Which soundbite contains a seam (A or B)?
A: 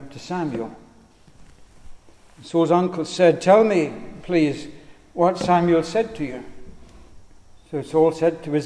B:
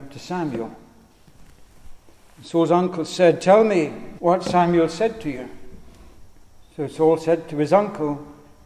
B